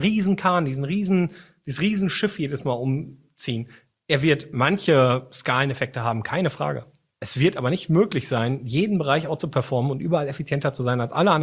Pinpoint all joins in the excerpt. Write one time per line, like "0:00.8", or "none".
none